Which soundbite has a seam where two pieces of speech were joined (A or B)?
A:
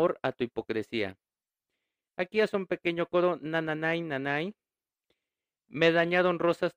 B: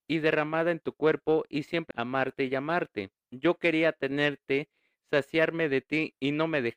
B